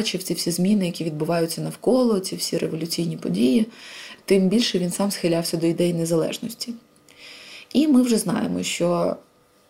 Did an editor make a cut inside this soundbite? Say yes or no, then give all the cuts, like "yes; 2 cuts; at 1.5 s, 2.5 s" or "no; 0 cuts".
no; 0 cuts